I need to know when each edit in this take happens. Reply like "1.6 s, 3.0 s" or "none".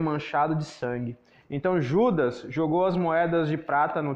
1.4 s